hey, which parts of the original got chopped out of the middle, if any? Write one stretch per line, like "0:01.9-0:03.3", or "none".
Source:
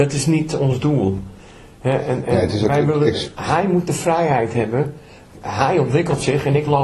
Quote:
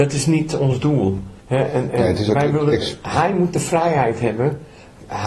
0:01.4-0:01.7